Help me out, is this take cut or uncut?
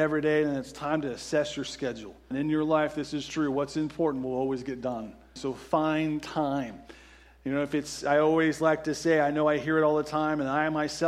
cut